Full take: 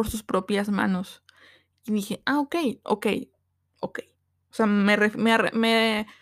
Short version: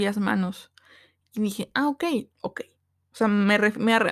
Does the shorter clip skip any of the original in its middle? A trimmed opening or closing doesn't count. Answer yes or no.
yes